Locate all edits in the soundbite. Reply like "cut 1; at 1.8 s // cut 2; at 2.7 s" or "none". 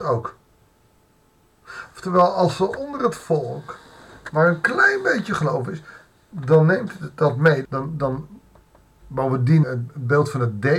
cut 1; at 7.6 s // cut 2; at 9.6 s